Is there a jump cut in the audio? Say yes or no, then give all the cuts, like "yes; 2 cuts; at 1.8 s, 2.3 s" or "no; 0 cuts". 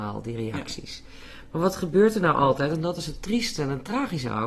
no; 0 cuts